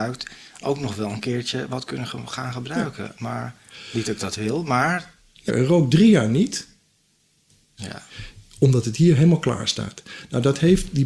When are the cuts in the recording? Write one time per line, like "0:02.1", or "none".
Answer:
0:05.5
0:07.8

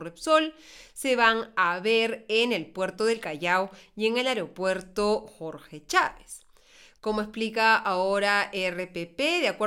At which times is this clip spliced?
none

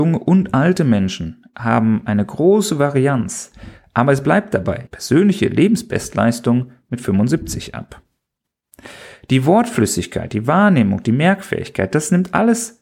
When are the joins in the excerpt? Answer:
0:04.9

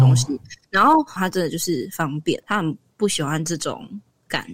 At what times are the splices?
0:01.2
0:02.4

